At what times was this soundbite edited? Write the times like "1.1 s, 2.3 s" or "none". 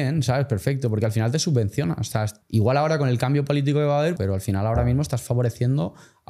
2.4 s, 4.2 s